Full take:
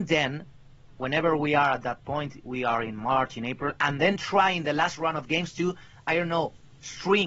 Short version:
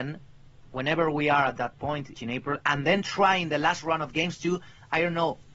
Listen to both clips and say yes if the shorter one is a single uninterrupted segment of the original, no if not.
no